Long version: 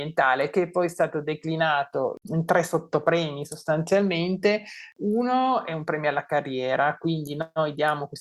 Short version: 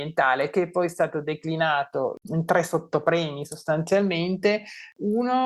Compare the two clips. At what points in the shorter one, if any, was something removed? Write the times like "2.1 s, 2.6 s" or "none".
none